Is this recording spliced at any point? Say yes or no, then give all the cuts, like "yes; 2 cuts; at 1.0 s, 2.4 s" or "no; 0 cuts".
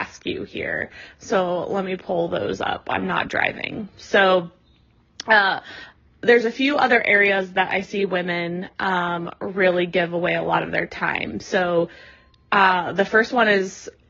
no; 0 cuts